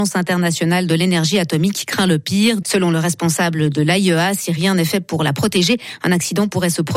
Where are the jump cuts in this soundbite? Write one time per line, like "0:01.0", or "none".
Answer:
0:02.6